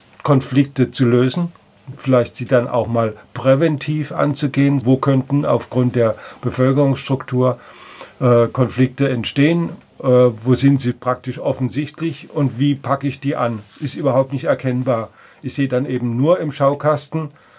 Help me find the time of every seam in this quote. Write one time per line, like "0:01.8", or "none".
0:04.8